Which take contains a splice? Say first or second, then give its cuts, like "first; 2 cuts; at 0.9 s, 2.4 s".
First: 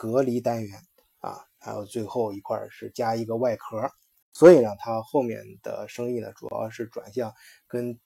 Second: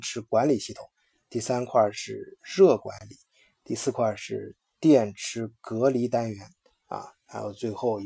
first; 1 cut; at 4.2 s